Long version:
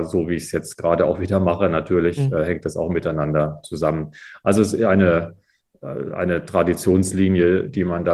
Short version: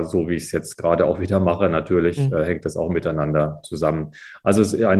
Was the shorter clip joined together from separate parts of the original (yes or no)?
no